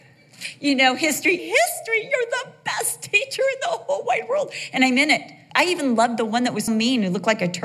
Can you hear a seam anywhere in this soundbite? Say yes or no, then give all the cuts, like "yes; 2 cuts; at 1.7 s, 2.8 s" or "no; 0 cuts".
yes; 3 cuts; at 1.4 s, 5.5 s, 6.7 s